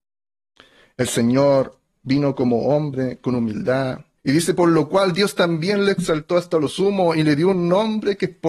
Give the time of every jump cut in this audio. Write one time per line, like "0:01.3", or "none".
0:04.2